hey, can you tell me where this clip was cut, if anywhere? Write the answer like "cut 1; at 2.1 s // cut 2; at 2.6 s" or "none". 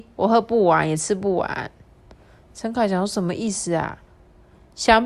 none